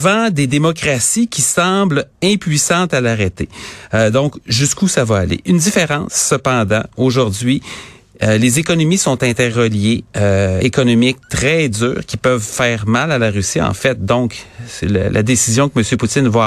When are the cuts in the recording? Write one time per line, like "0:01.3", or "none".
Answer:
0:10.6

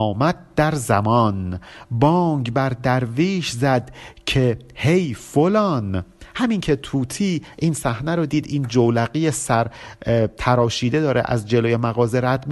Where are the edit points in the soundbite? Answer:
0:08.3

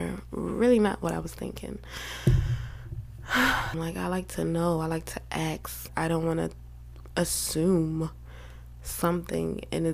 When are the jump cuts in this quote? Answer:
0:03.7
0:05.9

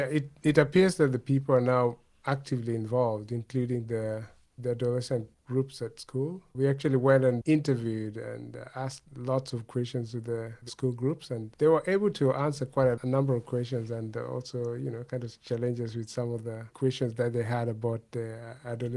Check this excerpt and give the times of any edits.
0:10.7

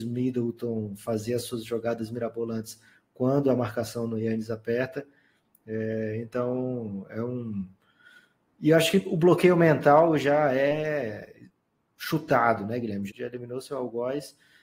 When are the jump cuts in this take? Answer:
0:05.5
0:13.1

